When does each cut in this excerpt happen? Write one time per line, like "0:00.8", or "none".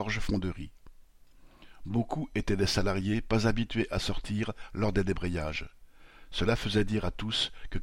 none

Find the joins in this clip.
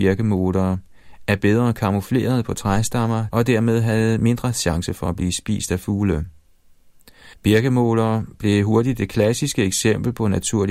0:03.3
0:07.3

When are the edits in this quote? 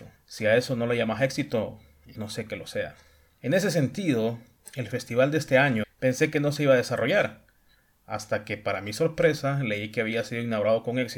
0:02.1
0:05.8

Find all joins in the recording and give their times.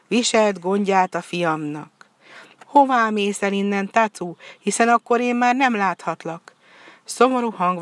0:02.6

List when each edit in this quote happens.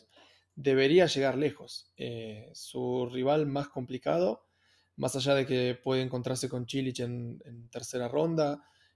none

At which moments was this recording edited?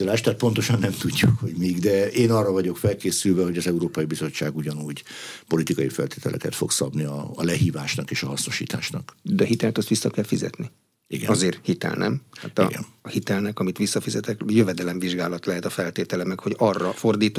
none

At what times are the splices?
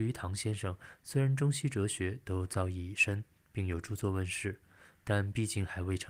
0:01.0

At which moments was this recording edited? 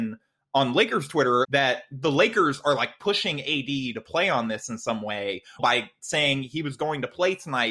0:01.4
0:05.6

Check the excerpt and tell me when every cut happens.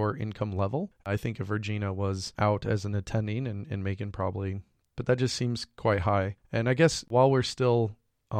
0:05.0

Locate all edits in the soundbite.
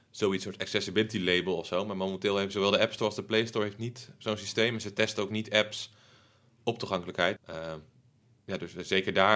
0:07.4

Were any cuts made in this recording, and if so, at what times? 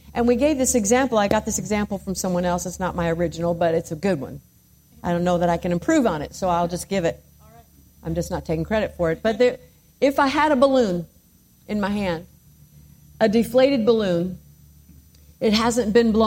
none

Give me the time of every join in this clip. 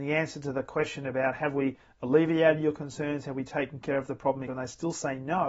0:04.5

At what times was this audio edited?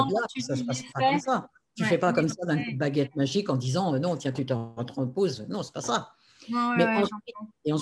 none

